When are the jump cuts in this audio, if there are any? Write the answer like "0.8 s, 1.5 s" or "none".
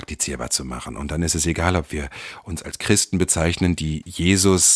none